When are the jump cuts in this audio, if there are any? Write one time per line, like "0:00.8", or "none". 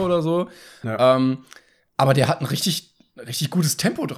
none